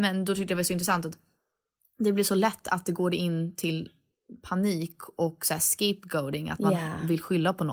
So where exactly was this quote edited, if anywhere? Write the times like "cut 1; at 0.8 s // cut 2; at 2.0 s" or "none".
none